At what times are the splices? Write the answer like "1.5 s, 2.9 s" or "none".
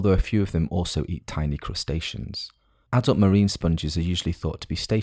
none